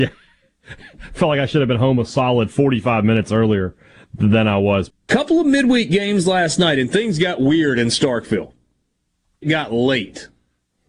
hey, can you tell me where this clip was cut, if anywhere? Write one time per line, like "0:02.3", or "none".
0:04.9
0:09.4